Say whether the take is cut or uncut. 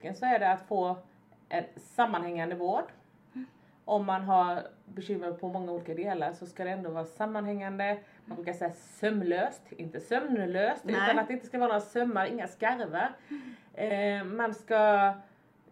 uncut